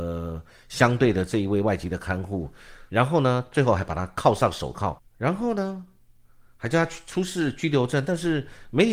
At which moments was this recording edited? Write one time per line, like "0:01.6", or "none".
0:02.9
0:05.0